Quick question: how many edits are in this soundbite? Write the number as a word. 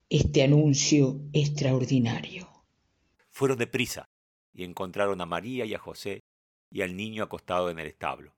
one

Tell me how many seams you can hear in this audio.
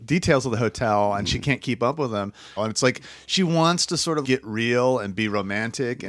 two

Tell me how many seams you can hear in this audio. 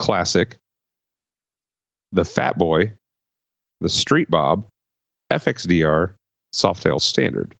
zero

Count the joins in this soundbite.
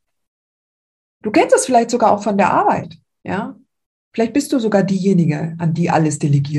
one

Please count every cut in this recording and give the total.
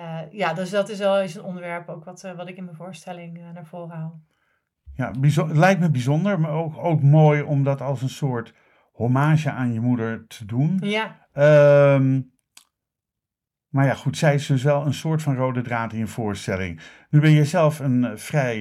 zero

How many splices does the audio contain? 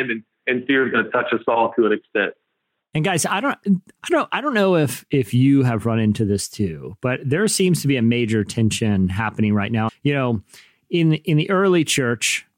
one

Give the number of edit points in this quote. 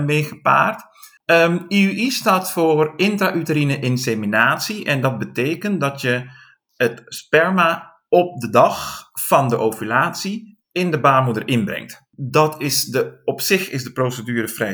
one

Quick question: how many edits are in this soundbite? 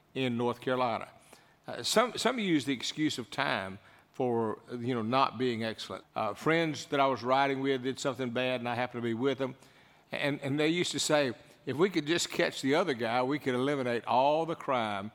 one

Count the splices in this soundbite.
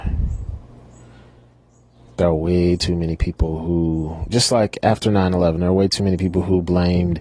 zero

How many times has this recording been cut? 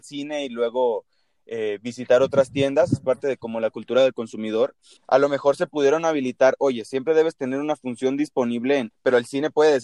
two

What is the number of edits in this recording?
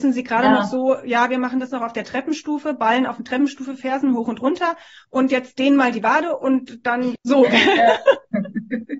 one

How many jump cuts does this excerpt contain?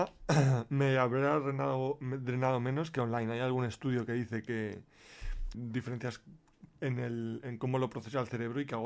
two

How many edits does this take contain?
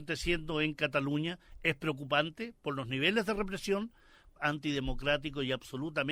one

